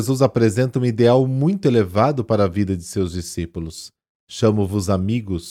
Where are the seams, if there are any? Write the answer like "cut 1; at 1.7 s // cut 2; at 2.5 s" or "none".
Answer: cut 1; at 4.2 s